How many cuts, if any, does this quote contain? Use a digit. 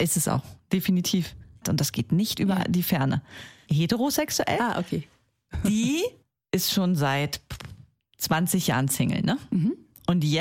2